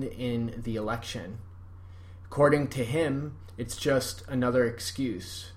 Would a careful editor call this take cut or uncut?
uncut